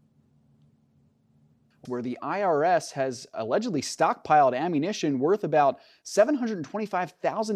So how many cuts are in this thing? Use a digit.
1